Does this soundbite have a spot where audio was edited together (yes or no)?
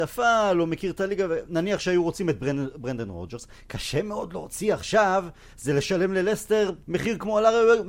yes